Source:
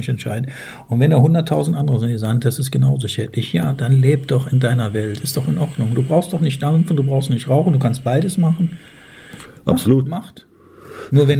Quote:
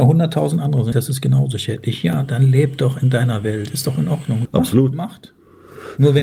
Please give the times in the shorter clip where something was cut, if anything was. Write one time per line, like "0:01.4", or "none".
0:00.9
0:04.5